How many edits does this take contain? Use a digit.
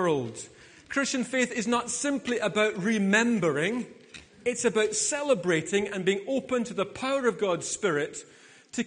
0